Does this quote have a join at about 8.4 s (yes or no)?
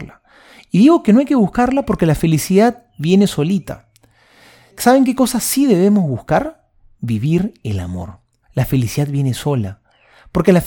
yes